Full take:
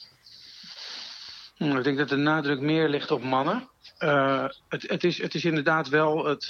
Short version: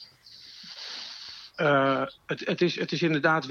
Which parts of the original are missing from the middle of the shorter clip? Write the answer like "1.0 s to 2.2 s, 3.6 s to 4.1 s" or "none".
1.5 s to 3.9 s